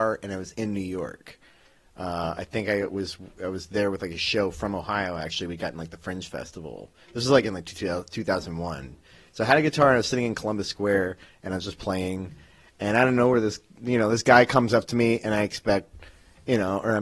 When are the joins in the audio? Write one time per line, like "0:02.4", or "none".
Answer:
none

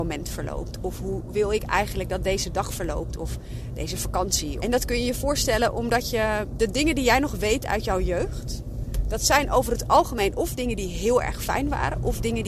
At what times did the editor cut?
0:04.6

